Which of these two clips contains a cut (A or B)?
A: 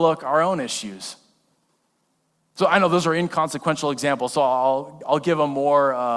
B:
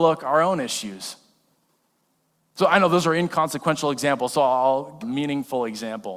B